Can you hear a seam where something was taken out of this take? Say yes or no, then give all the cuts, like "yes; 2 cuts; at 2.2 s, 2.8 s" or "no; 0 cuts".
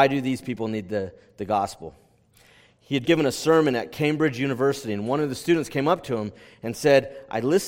yes; 1 cut; at 3.0 s